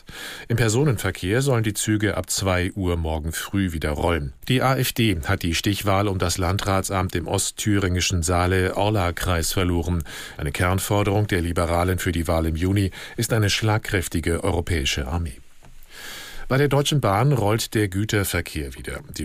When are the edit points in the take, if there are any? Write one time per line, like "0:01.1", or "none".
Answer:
0:04.4
0:10.3